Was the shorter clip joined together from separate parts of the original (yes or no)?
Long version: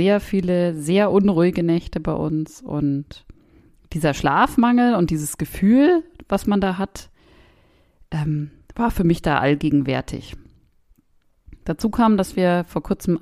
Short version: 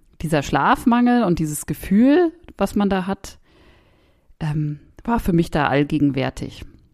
no